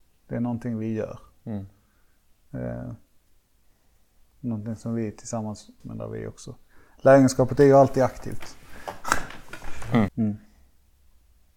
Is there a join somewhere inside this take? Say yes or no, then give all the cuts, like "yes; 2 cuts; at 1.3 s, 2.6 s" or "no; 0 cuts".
yes; 2 cuts; at 5.8 s, 10.1 s